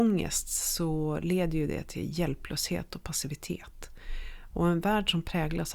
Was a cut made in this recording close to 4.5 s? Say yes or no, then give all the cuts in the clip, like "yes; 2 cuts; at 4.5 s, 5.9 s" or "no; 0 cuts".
no; 0 cuts